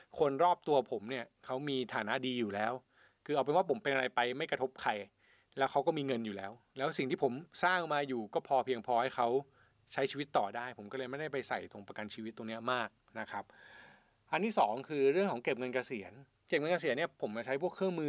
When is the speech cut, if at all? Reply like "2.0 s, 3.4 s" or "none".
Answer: none